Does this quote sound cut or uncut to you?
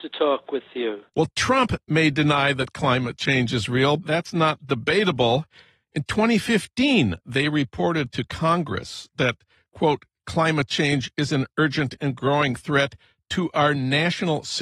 cut